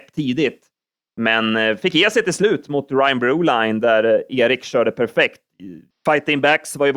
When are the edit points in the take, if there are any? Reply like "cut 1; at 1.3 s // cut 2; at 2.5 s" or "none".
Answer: cut 1; at 5.9 s